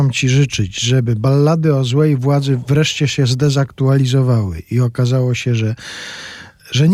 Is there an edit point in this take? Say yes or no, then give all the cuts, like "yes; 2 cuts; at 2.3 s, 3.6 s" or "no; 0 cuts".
no; 0 cuts